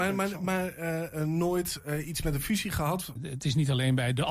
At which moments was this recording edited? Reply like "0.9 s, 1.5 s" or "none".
3.2 s